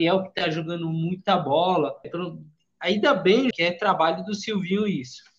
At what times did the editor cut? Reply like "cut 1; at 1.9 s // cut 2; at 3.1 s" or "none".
cut 1; at 2.0 s // cut 2; at 3.5 s